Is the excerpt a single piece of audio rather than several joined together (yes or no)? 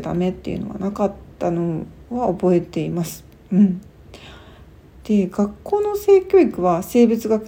no